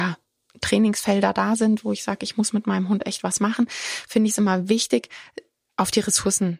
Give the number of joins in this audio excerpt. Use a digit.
0